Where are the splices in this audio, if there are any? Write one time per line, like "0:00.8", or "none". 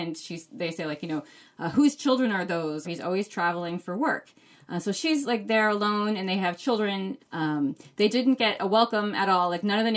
0:02.8
0:07.2